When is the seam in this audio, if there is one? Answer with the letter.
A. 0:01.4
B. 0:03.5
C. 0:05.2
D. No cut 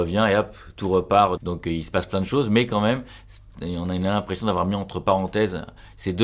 A